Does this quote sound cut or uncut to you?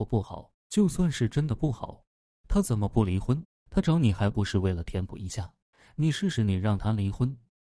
uncut